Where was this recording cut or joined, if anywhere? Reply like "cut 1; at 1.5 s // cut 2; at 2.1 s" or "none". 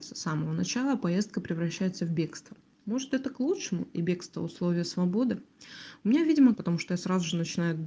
cut 1; at 6.5 s